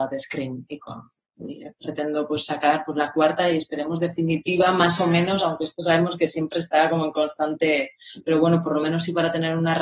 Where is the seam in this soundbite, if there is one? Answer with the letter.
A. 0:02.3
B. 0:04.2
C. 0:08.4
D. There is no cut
D